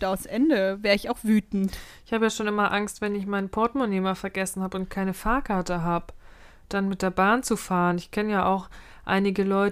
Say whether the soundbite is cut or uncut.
uncut